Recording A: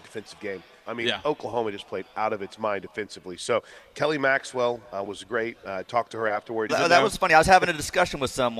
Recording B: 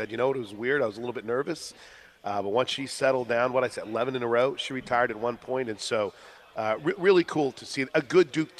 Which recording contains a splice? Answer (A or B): A